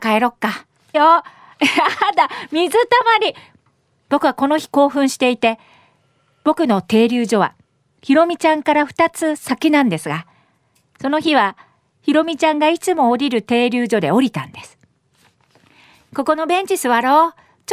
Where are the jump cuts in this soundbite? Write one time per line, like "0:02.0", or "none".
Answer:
0:00.9